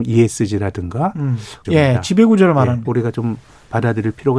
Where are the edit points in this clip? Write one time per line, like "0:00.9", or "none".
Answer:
0:01.6
0:02.8